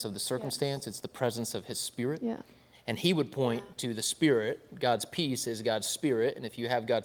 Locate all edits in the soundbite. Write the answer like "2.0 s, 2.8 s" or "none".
2.7 s